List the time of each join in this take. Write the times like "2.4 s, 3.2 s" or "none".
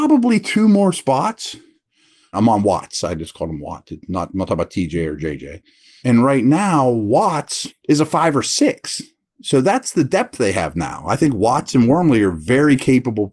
2.3 s, 6.0 s, 7.7 s